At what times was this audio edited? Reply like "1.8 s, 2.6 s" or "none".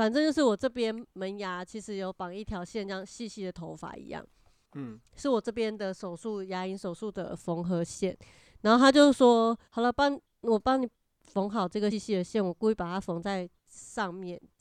9.6 s, 11.9 s